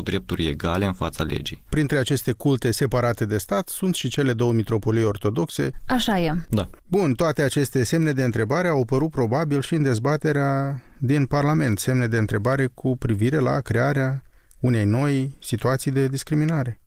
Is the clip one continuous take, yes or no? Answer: yes